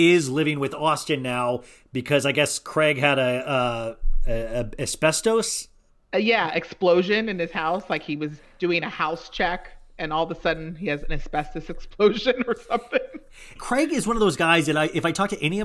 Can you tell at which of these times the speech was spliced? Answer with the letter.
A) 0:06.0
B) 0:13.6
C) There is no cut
B